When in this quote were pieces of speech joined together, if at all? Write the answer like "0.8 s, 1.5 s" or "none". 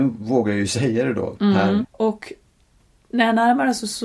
1.8 s